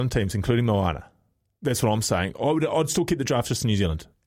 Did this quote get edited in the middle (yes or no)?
no